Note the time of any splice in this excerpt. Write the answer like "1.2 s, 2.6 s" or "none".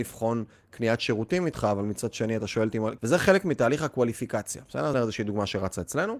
3.0 s, 4.9 s

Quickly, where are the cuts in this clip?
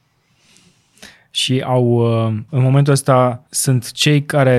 3.5 s

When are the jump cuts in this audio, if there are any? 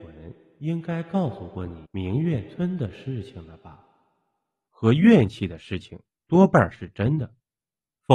1.9 s, 4.7 s

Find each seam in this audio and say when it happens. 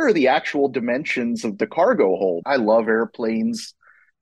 2.4 s

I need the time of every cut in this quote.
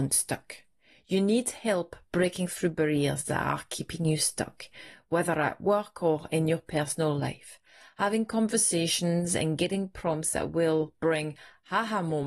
none

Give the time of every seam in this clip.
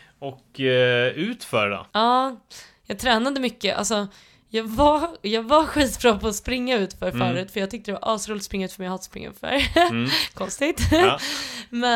1.9 s

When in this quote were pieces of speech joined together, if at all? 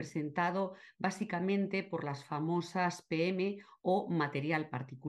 none

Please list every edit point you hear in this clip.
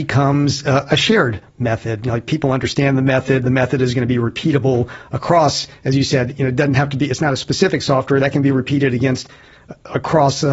none

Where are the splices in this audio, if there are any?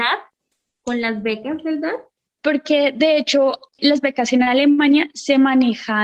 2.4 s, 3.8 s

